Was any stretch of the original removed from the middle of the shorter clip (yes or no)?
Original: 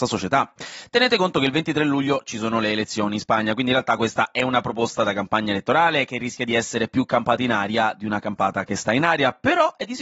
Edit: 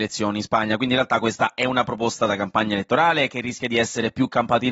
no